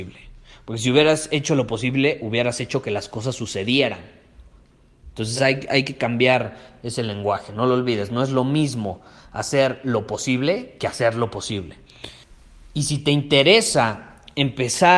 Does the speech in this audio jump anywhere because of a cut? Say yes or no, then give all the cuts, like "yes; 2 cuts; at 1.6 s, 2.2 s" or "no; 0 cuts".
no; 0 cuts